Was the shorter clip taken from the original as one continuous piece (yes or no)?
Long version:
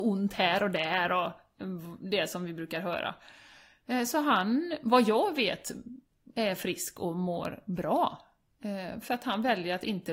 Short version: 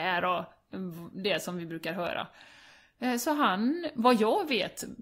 yes